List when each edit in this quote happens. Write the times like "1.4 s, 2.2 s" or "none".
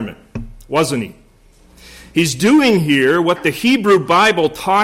none

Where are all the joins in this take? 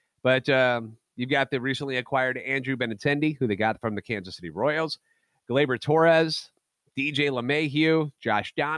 none

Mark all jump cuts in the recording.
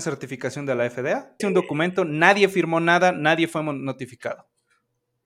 1.4 s

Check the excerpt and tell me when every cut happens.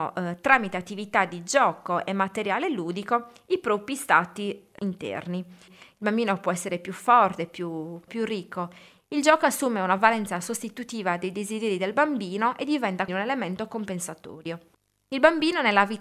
5.7 s, 8.1 s, 13.1 s

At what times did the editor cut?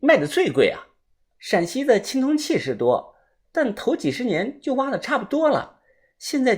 1.4 s

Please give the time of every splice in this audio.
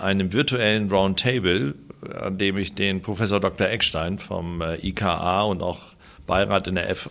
none

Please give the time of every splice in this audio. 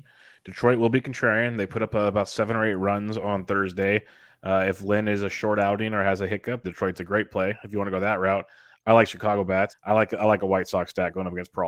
6.6 s, 9.7 s

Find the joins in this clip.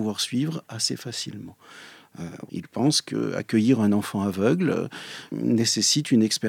2.5 s

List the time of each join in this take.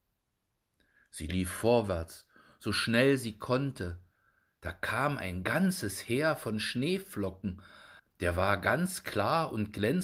8.0 s

